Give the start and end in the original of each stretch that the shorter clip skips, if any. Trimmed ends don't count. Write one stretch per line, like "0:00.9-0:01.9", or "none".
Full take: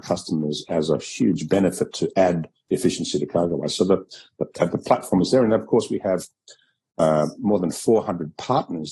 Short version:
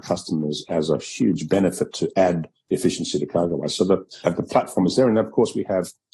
0:04.2-0:04.6